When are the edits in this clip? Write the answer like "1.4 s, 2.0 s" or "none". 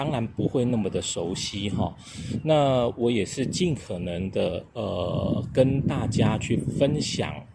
none